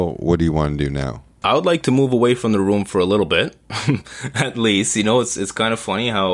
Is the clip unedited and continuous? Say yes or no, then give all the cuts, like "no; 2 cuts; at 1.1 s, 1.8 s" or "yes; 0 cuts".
yes; 0 cuts